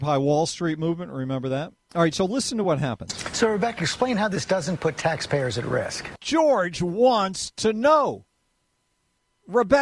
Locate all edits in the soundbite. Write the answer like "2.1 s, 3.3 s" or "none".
none

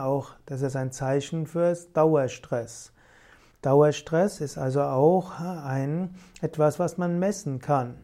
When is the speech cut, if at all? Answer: 3.5 s

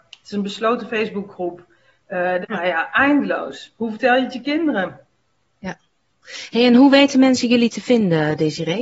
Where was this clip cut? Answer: 2.4 s

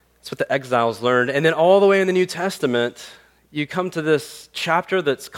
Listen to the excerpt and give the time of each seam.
none

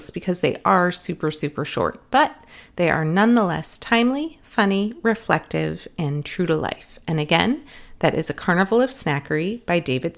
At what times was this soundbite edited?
none

